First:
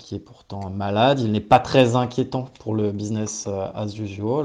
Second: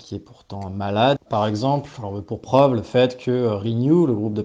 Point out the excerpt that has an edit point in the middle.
second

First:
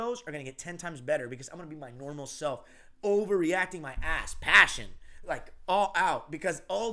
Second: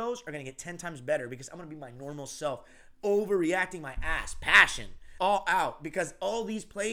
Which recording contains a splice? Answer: second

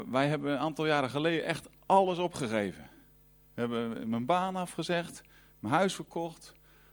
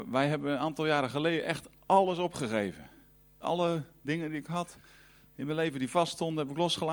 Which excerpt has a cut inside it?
second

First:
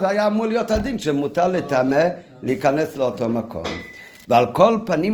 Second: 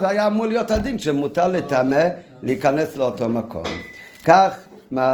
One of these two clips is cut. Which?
first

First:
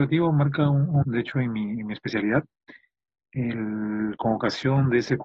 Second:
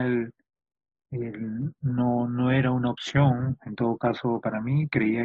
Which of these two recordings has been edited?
first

